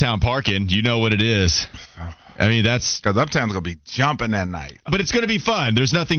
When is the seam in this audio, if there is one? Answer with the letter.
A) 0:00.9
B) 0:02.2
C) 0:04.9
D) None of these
C